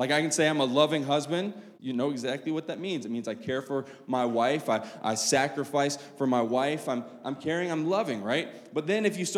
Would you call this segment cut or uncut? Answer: cut